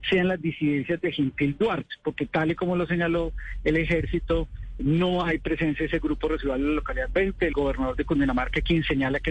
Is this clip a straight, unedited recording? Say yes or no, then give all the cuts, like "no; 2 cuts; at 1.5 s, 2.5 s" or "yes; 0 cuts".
no; 2 cuts; at 4.8 s, 7.5 s